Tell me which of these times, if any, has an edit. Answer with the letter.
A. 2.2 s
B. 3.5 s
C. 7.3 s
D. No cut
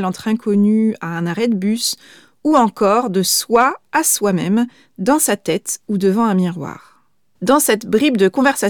C